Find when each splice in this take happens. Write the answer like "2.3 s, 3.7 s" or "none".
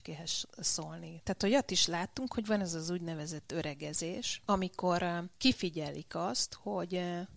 1.2 s